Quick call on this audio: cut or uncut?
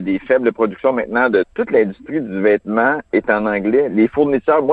cut